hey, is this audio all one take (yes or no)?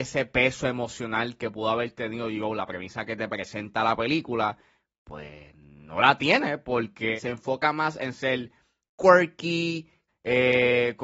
no